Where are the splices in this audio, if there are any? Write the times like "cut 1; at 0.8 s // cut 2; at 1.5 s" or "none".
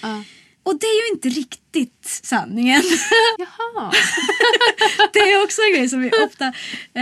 cut 1; at 3.3 s